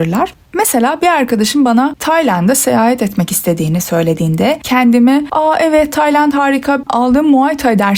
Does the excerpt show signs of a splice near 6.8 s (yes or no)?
yes